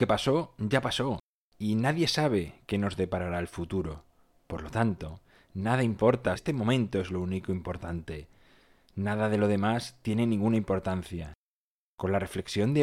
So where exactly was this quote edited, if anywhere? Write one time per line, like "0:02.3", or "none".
0:06.4